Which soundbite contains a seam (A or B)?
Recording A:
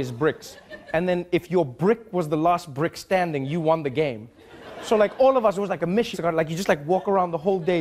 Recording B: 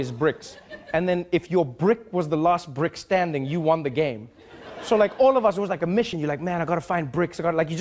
A